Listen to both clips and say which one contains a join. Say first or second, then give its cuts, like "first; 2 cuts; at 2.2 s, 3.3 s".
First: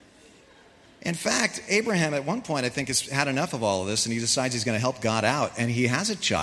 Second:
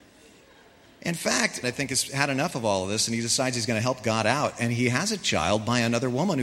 second; 1 cut; at 1.6 s